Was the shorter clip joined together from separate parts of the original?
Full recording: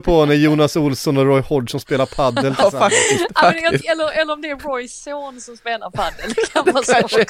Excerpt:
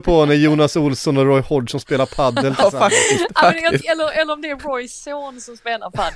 no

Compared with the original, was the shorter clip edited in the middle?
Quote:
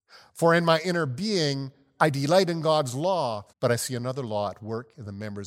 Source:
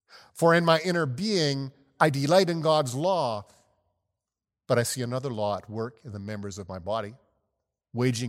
yes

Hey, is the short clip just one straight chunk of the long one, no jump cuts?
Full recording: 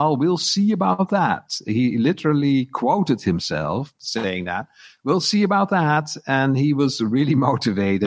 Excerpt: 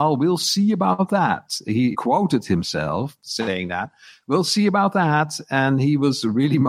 no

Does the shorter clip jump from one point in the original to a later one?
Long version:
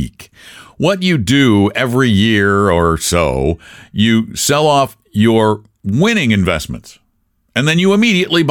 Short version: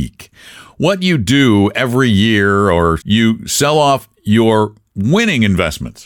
yes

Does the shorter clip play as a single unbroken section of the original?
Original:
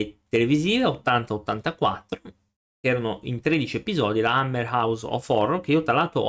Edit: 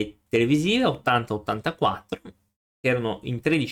yes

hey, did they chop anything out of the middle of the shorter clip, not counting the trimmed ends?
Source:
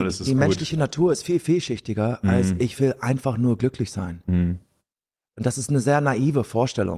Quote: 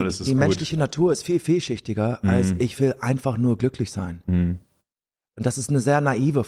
no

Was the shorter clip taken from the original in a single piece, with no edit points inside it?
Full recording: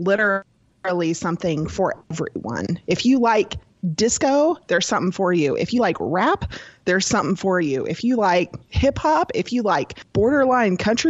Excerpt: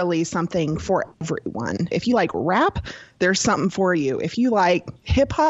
no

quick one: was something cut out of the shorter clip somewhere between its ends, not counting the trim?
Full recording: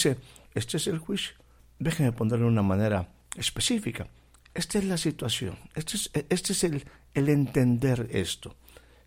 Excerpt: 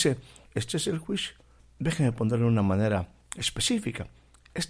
no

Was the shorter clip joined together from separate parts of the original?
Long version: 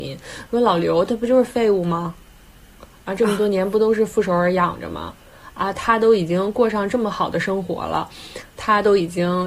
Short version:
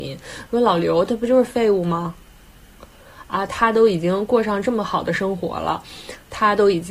yes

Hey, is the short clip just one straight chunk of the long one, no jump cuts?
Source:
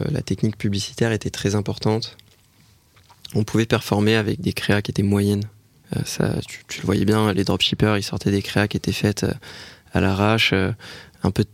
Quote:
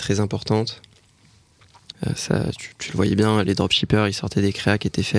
no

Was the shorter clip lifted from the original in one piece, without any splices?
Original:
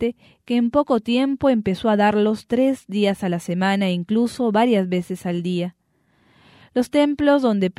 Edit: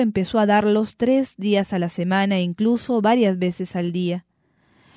yes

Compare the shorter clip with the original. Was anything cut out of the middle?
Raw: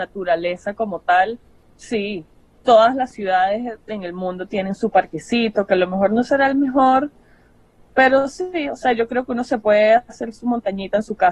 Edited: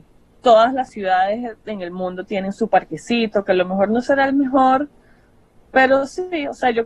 no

